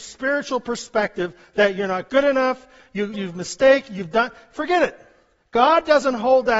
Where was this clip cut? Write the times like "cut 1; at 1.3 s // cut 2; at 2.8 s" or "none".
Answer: cut 1; at 3.1 s